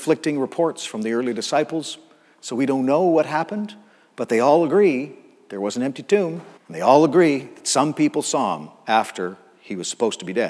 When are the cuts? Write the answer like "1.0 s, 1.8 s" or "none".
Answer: 6.6 s